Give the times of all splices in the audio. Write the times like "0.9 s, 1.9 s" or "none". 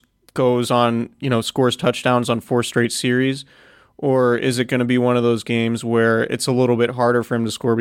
none